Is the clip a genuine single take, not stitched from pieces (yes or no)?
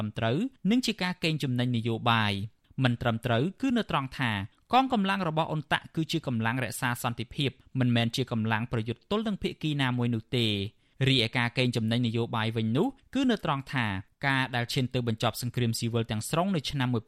yes